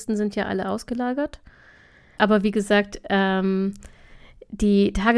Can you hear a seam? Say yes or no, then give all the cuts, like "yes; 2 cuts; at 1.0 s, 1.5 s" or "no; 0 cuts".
yes; 1 cut; at 2.2 s